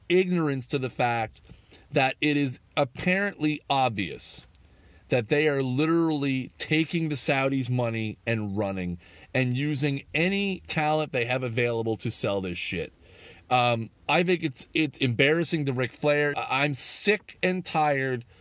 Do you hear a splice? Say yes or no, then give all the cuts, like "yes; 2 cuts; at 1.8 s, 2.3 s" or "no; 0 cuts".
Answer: yes; 2 cuts; at 14.0 s, 16.3 s